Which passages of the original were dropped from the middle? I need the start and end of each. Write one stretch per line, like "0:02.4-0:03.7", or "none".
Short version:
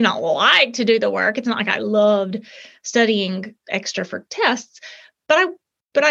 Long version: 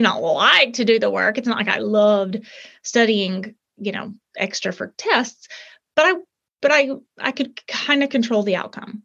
0:03.6-0:04.3